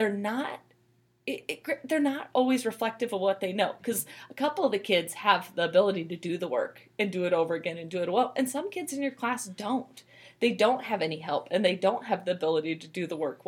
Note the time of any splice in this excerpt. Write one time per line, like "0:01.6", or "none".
none